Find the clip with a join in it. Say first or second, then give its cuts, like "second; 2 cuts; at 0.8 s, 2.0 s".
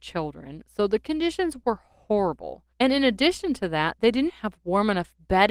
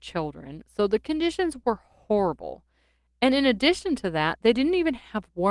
first; 2 cuts; at 2.7 s, 4.3 s